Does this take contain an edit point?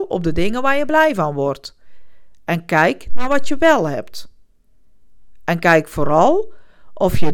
no; 0 cuts

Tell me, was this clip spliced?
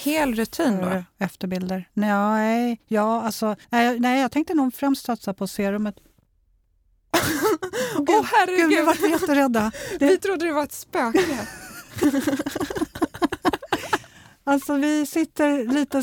yes; 1 cut; at 3.6 s

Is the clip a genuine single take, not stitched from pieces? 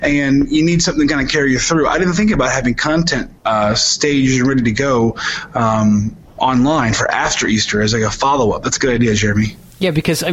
yes; 0 cuts

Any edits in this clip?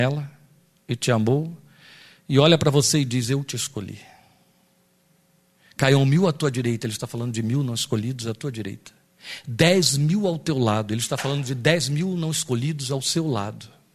no; 0 cuts

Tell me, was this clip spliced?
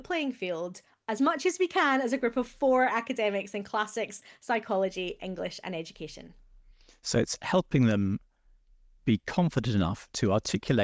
no; 0 cuts

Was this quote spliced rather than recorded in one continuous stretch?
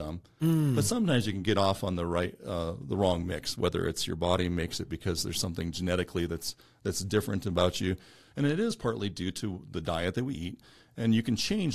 yes; 1 cut; at 8.3 s

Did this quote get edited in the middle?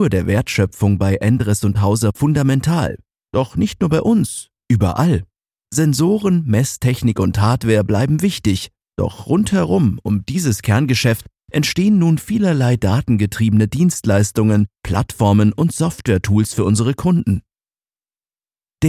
yes; 2 cuts; at 8.8 s, 14.8 s

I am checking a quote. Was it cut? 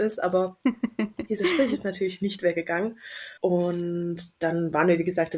yes; 1 cut; at 3.4 s

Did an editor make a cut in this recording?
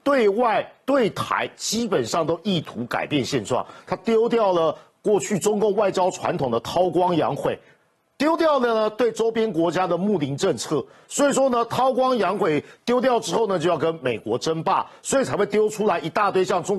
no; 0 cuts

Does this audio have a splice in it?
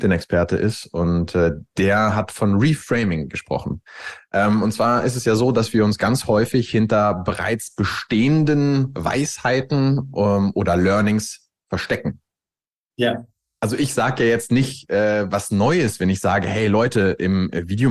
no; 0 cuts

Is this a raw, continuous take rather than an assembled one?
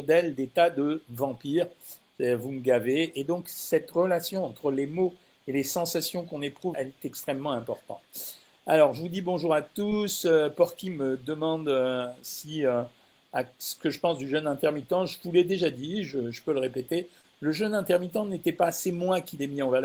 no; 2 cuts; at 2.0 s, 6.7 s

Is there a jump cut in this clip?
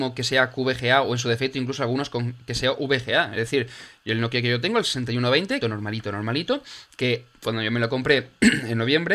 yes; 1 cut; at 5.6 s

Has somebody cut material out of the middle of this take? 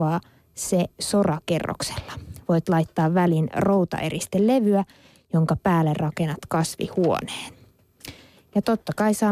no; 0 cuts

